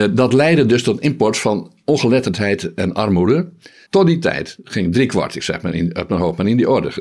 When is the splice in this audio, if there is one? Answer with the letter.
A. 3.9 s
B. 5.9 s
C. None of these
A